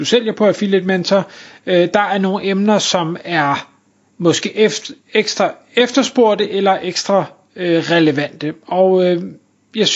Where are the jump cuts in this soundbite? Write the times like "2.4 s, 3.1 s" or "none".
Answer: none